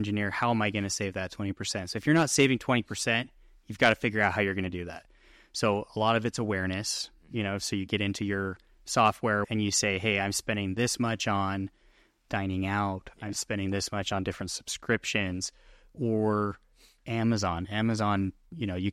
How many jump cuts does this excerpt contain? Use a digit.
1